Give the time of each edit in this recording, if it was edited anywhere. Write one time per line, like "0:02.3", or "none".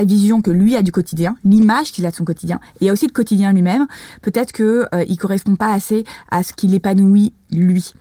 none